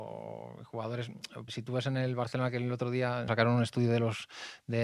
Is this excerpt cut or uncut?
cut